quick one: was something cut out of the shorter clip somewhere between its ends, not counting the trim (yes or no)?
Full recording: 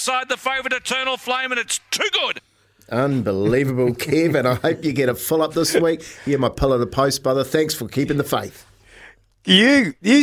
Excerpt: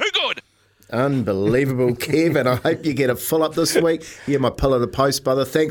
no